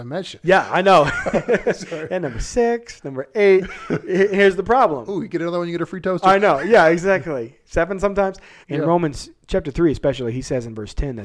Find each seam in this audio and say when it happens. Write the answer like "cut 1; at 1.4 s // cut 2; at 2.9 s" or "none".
cut 1; at 8.6 s